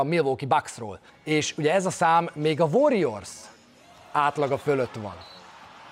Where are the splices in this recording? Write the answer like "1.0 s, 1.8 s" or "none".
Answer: 1.1 s